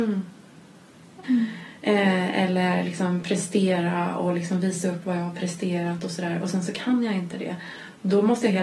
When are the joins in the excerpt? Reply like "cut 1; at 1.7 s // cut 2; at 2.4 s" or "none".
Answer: cut 1; at 1.2 s